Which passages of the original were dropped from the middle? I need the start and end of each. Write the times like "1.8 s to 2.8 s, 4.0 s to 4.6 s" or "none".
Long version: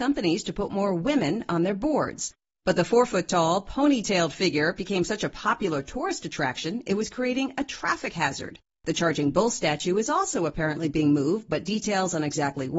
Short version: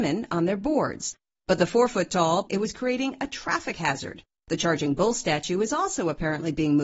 3.6 s to 6.8 s